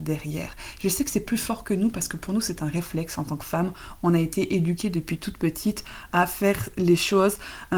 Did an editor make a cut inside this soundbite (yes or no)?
no